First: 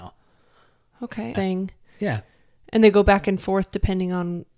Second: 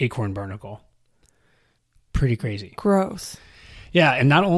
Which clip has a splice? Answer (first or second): first